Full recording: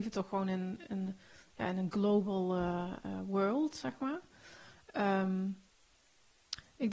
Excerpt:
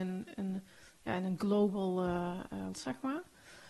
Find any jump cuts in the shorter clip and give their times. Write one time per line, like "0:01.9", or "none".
0:02.7